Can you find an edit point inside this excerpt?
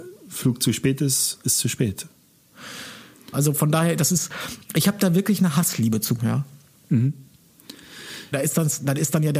yes; 3 cuts; at 3.3 s, 6.2 s, 8.3 s

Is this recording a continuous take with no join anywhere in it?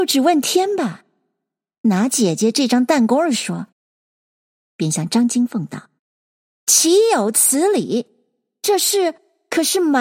no; 2 cuts; at 3.7 s, 6.0 s

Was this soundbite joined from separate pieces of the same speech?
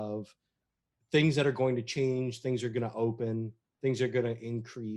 no; 0 cuts

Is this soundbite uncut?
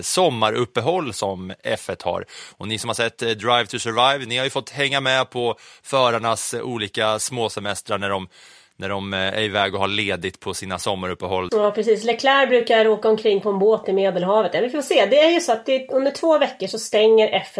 no; 1 cut; at 11.5 s

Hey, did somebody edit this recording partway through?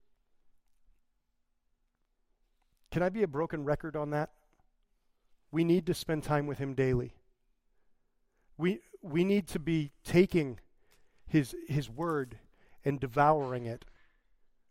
no; 0 cuts

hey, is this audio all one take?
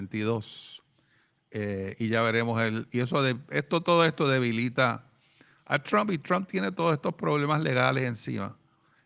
yes; 0 cuts

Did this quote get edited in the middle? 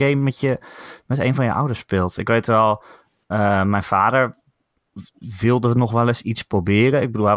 no; 0 cuts

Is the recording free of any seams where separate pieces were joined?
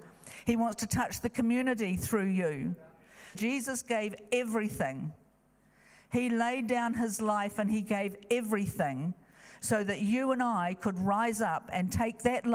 no; 1 cut; at 3.3 s

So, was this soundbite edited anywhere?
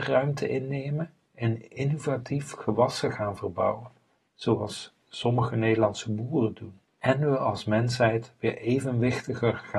yes; 1 cut; at 6.9 s

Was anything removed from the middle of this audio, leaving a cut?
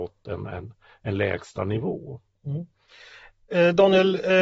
no; 0 cuts

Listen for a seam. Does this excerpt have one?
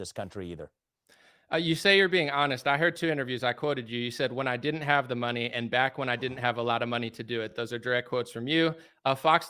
no; 0 cuts

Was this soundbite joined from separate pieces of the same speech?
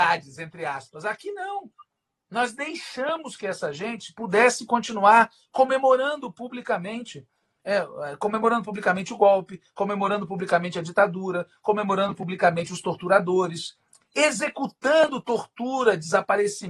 no; 0 cuts

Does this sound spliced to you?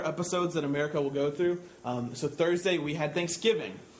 no; 0 cuts

